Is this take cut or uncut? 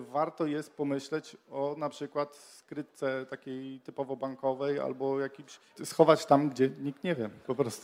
cut